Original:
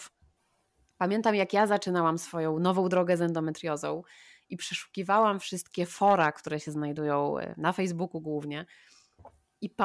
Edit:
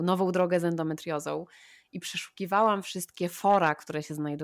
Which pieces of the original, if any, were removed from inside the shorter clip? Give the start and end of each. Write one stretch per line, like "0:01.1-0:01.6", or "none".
none